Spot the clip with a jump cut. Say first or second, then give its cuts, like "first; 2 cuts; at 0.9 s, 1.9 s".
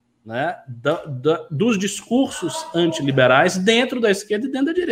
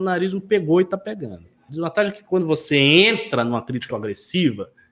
second; 2 cuts; at 1.7 s, 3.9 s